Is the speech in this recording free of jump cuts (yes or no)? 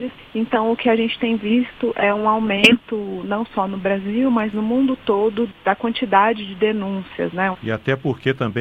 no